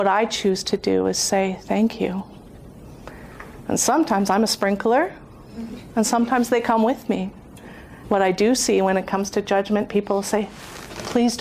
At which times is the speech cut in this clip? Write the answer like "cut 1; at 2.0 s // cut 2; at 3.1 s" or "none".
cut 1; at 8.0 s